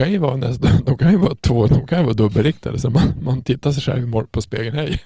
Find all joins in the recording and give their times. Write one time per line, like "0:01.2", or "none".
none